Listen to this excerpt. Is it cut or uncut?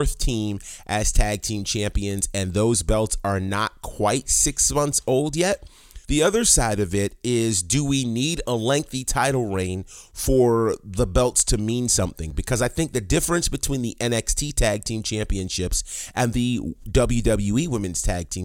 cut